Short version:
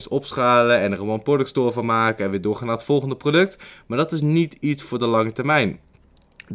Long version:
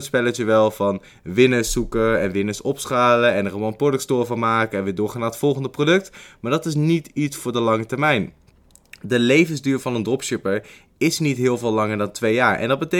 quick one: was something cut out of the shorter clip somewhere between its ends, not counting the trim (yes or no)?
no